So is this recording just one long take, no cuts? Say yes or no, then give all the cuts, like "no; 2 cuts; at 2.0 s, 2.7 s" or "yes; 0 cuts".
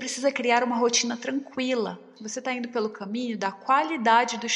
yes; 0 cuts